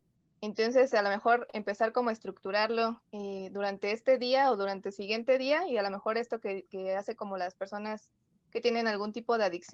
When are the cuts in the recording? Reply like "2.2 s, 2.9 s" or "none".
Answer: none